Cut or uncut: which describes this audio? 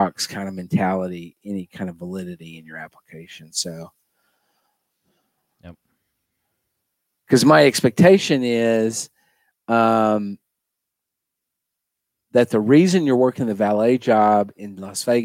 uncut